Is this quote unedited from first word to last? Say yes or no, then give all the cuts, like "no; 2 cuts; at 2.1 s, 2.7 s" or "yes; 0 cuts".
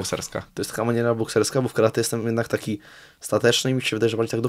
yes; 0 cuts